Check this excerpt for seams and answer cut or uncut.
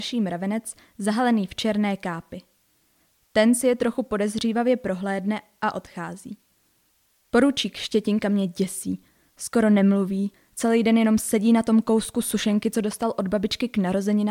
uncut